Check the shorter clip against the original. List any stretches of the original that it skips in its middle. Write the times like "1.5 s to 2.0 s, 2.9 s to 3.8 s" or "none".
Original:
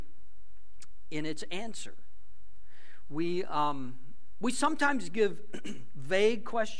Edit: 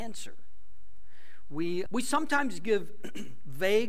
3.5 s to 4.4 s

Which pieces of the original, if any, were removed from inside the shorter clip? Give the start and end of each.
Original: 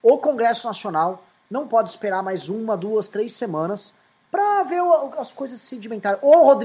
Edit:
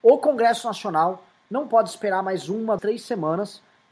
2.8 s to 3.1 s

